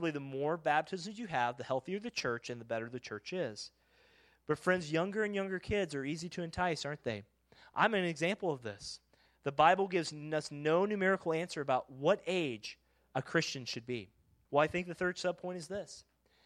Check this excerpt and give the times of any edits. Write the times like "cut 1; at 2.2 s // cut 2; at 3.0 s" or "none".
cut 1; at 9.2 s // cut 2; at 14.5 s